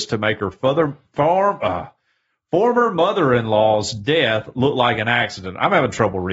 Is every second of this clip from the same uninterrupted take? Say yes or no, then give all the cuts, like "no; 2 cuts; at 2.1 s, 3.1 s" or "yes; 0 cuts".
yes; 0 cuts